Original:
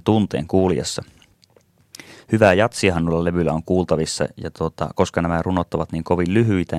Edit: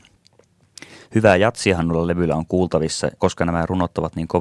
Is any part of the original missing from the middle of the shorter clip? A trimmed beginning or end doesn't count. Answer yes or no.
yes